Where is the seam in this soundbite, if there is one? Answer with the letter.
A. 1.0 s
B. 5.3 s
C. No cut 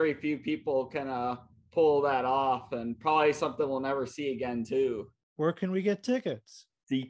B